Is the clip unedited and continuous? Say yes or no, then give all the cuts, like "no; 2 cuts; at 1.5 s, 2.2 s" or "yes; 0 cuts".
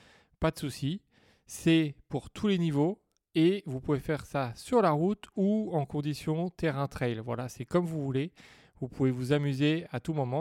no; 1 cut; at 1.3 s